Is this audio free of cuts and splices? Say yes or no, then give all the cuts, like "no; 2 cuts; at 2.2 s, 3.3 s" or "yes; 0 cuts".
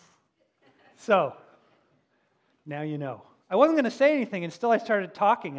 yes; 0 cuts